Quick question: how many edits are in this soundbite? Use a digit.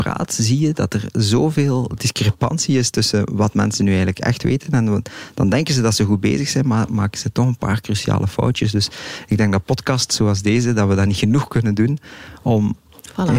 0